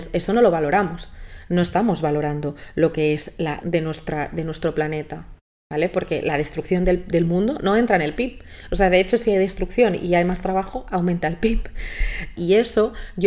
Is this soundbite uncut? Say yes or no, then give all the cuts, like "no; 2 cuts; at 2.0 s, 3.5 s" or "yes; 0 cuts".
no; 2 cuts; at 3.6 s, 12.4 s